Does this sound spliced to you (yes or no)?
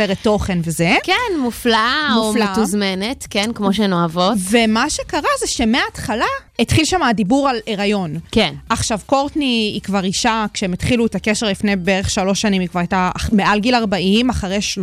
yes